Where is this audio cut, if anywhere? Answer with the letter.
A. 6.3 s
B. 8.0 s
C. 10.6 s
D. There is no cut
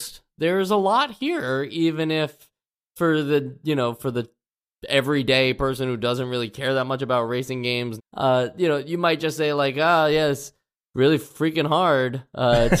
B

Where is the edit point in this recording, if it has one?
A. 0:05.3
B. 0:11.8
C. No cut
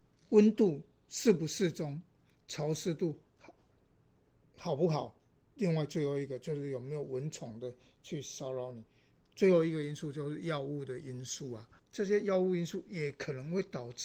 B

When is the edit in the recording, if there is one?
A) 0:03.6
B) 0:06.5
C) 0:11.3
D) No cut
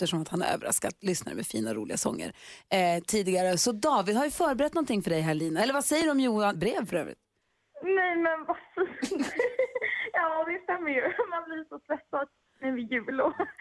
B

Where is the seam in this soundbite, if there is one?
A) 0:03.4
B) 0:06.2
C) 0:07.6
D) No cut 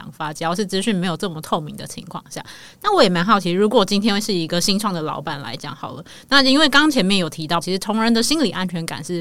C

